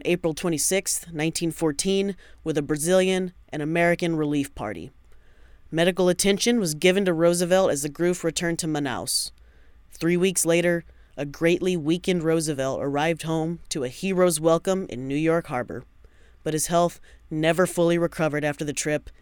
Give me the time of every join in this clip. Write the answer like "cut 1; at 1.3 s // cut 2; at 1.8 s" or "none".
none